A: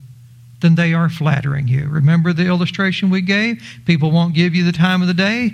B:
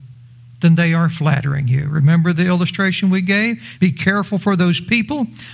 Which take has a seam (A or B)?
B